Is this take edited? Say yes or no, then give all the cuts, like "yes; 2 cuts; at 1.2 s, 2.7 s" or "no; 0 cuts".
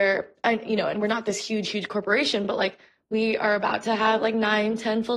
no; 0 cuts